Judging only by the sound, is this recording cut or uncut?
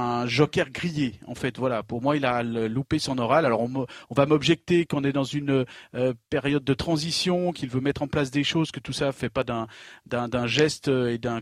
uncut